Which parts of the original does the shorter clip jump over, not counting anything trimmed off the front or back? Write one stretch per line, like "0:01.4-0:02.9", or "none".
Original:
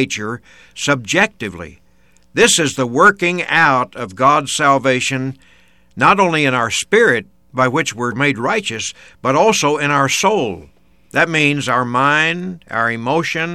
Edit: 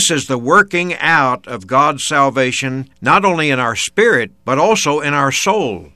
0:05.4-0:05.9
0:07.3-0:09.2

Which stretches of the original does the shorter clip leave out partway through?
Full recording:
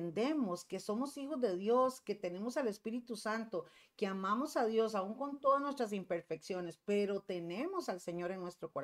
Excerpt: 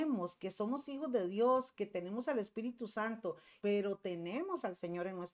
0:03.9-0:06.8

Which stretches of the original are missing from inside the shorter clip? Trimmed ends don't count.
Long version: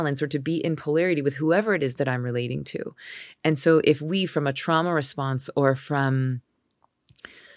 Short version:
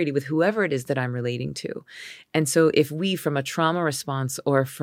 none

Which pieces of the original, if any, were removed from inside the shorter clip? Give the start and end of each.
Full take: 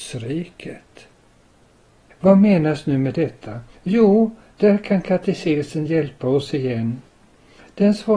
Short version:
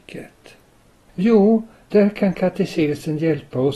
0:01.6-0:03.8

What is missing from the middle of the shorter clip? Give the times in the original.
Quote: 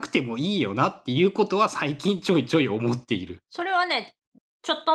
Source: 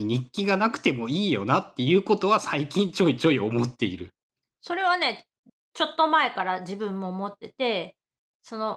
0:04.1-0:04.6

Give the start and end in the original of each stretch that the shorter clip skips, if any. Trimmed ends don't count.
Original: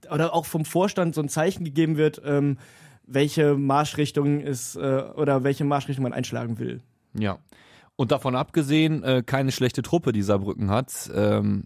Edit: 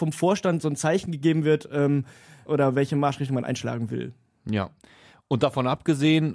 0:03.0-0:05.1

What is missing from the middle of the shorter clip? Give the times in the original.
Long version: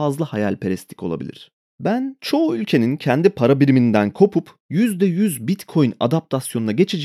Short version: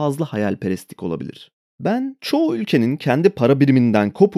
none

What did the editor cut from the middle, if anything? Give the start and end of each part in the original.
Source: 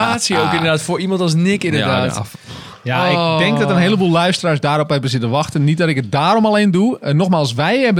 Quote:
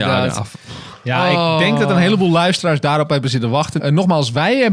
0:05.6-0:07.0

